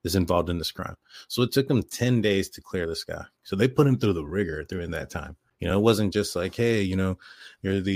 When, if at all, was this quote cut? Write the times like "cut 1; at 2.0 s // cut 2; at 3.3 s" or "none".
none